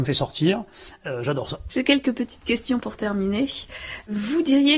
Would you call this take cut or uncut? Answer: uncut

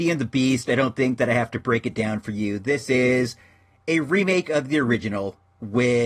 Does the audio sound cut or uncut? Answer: uncut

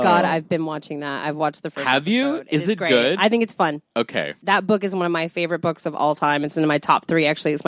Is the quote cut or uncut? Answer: cut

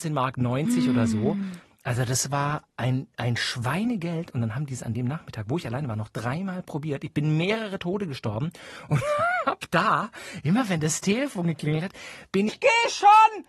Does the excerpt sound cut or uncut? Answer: cut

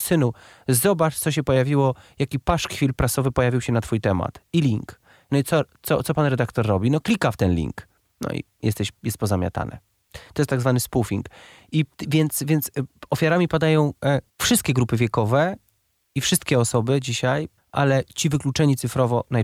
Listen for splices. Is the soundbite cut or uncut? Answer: cut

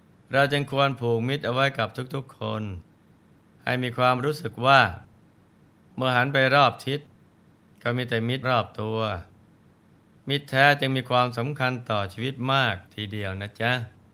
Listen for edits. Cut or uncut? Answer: cut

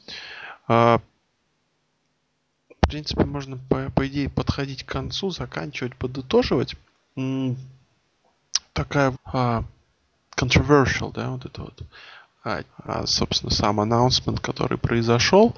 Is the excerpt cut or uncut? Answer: cut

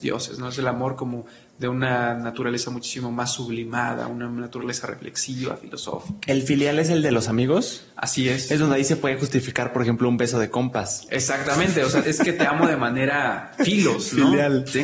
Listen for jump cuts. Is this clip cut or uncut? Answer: cut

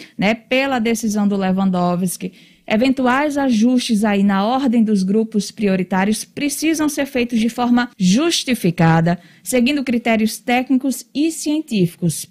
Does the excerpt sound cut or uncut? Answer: cut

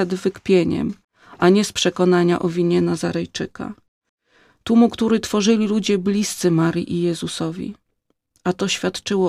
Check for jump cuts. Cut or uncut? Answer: uncut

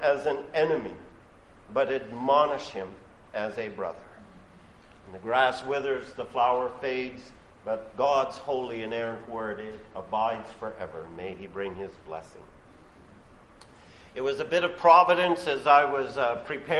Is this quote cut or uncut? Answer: uncut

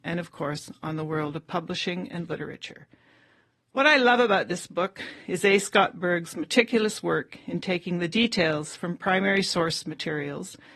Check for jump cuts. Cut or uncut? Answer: uncut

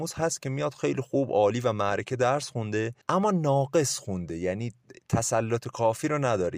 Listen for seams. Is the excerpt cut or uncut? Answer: cut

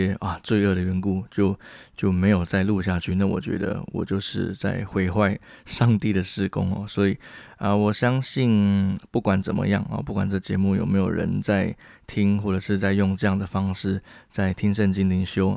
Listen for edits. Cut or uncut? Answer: uncut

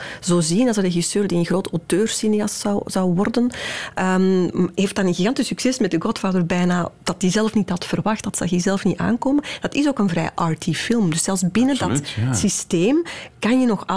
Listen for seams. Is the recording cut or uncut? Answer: uncut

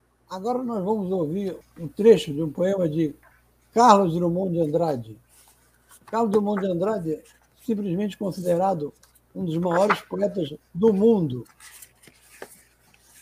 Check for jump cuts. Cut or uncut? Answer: cut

